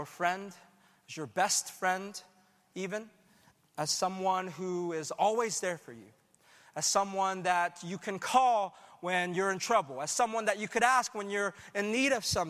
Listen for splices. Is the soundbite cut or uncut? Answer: uncut